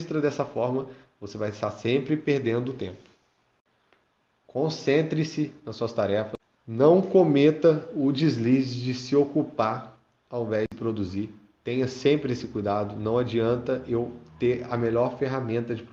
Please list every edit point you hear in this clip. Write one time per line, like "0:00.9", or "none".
none